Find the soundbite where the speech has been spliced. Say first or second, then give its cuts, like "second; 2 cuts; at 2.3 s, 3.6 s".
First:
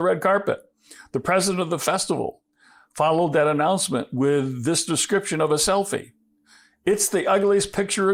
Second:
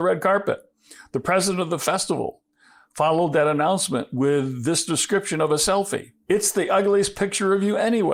second; 1 cut; at 6.2 s